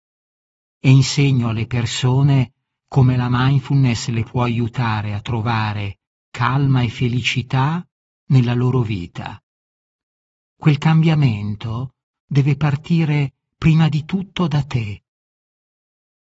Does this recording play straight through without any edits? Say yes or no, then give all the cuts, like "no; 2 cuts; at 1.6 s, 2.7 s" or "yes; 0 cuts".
no; 1 cut; at 10.5 s